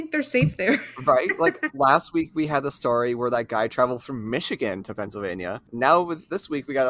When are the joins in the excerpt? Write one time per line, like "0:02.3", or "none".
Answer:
none